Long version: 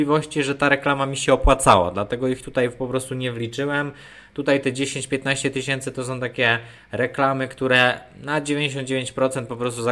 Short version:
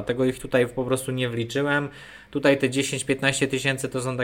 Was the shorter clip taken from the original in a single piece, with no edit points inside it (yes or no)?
yes